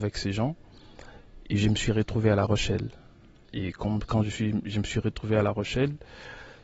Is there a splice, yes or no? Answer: no